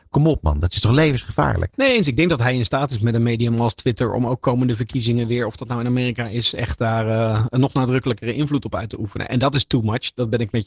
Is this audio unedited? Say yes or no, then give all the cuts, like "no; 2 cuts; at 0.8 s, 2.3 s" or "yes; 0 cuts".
yes; 0 cuts